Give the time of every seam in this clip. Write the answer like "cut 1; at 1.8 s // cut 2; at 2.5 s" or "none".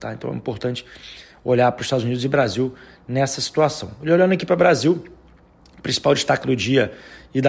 none